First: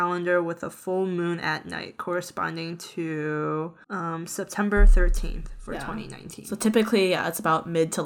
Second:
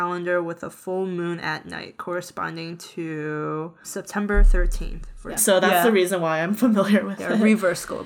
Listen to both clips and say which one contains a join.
second; 2 cuts; at 3.8 s, 5.4 s

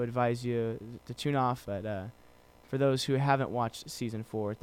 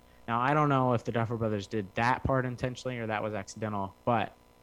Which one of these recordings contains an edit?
first; 1 cut; at 1.6 s

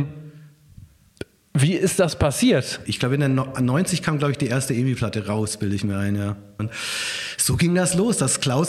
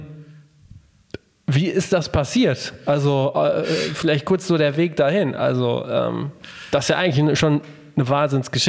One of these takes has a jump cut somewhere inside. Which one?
first; 2 cuts; at 2.9 s, 6.6 s

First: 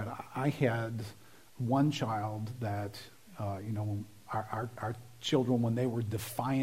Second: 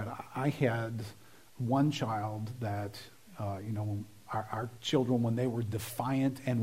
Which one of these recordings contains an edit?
second; 1 cut; at 4.8 s

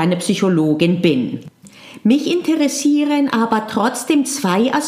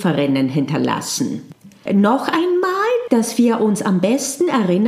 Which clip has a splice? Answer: second; 2 cuts; at 1.9 s, 3.1 s

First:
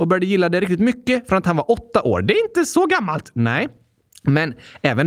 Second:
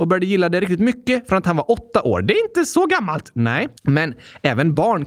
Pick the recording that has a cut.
second; 1 cut; at 3.8 s

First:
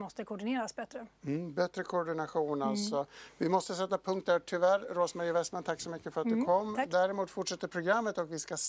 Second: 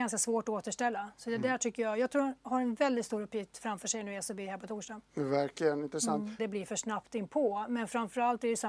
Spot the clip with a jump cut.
second; 1 cut; at 6.4 s

